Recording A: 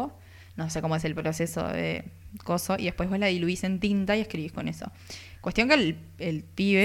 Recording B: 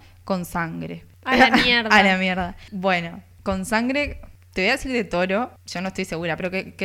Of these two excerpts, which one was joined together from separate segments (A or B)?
B